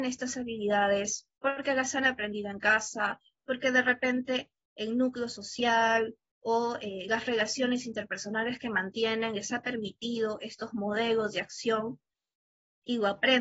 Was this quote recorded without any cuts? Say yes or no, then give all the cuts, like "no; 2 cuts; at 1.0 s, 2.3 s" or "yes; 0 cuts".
yes; 0 cuts